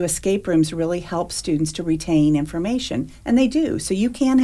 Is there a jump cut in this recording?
no; 0 cuts

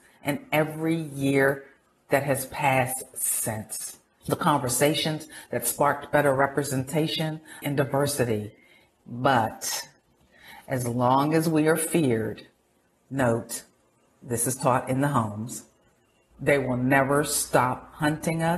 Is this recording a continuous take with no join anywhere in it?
no; 2 cuts; at 4.2 s, 7.6 s

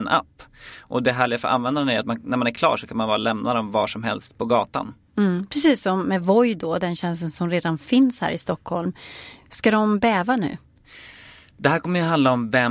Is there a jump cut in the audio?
no; 0 cuts

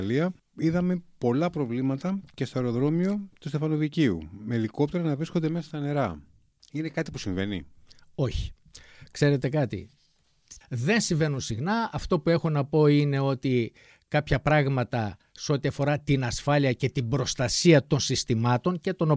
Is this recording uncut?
no; 1 cut; at 10.6 s

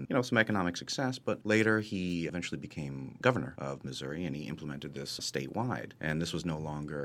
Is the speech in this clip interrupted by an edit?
no; 0 cuts

